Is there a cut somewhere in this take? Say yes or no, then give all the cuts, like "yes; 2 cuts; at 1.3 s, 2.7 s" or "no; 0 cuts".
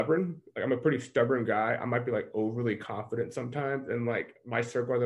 no; 0 cuts